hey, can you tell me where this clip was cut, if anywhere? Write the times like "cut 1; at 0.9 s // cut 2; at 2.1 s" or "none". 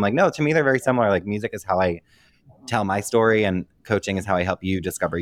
none